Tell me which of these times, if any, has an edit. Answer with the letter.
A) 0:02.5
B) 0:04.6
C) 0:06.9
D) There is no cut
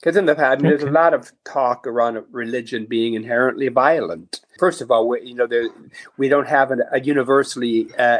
B